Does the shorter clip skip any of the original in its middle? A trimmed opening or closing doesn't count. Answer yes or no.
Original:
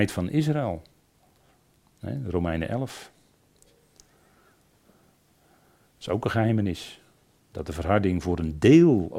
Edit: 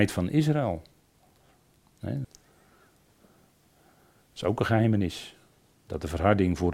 yes